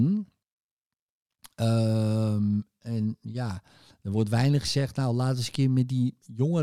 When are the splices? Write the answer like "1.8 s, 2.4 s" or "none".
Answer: none